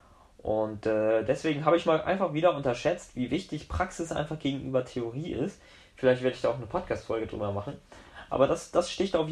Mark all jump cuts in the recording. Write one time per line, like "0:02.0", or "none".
none